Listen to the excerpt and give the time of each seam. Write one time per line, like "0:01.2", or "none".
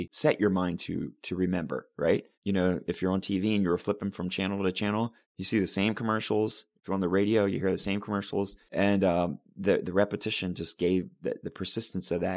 0:02.4